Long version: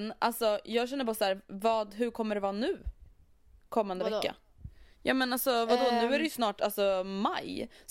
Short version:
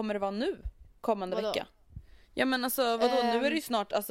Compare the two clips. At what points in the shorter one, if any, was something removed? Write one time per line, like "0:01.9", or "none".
0:01.0